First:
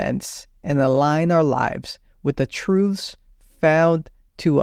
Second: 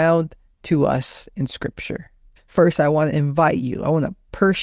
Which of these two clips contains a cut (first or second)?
second